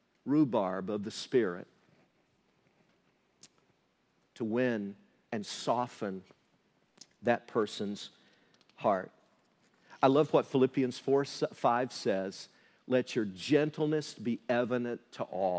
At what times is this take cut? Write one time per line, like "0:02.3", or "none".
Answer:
none